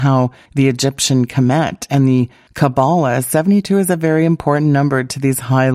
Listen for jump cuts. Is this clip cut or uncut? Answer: uncut